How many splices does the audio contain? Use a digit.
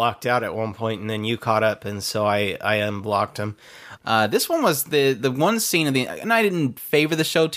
1